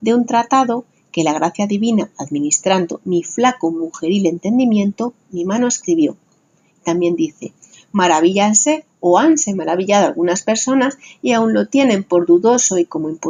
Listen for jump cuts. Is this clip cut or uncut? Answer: uncut